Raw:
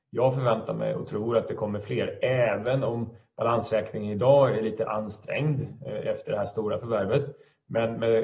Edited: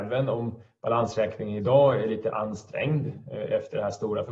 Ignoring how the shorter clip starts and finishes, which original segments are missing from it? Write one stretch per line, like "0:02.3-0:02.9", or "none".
none